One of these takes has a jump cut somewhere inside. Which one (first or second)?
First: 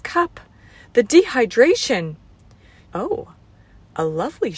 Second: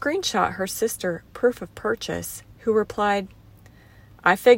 first